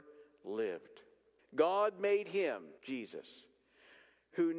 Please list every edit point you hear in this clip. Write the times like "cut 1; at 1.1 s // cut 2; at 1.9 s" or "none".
cut 1; at 1.4 s // cut 2; at 2.8 s

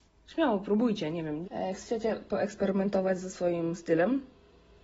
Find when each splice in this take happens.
cut 1; at 1.4 s

